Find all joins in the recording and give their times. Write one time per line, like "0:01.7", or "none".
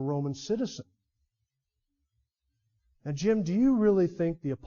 none

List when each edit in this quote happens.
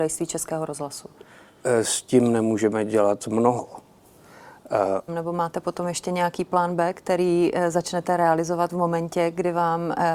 0:05.1

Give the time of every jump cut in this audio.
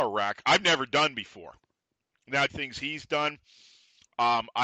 0:02.5

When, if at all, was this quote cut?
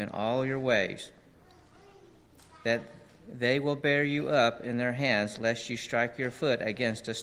none

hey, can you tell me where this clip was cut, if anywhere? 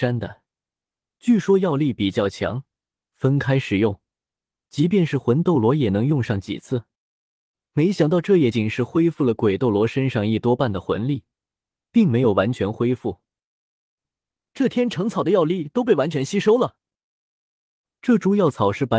0:08.5
0:14.0

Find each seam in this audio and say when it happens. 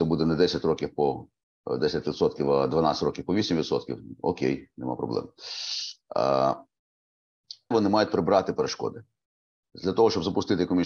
0:07.7
0:09.6

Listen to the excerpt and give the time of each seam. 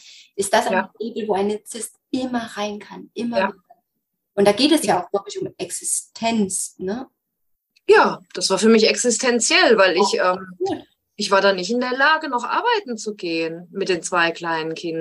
none

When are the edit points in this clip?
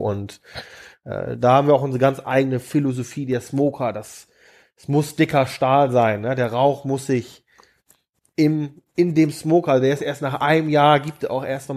none

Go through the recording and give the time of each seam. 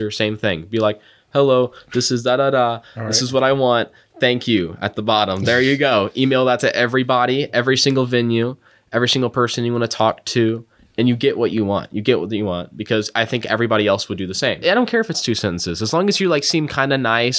0:14.6

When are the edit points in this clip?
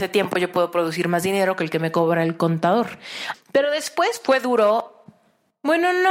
0:03.3

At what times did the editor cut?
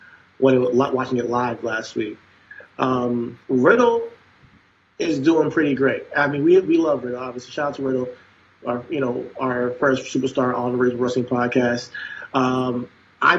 0:03.4

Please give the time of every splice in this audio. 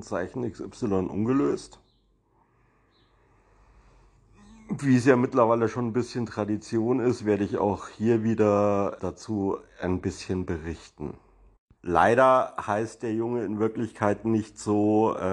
0:09.0
0:11.8

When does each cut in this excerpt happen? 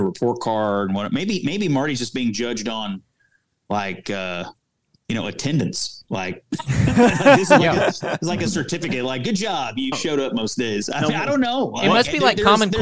0:09.9

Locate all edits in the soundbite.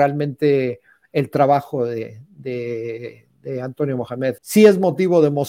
0:04.4

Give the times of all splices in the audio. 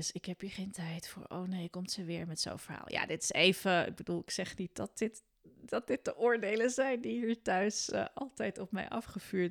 none

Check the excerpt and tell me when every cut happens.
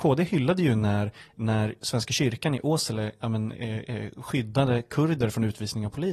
0:03.5

